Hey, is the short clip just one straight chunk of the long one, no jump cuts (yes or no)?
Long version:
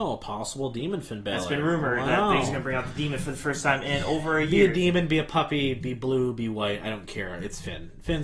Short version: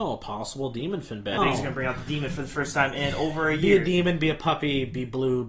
no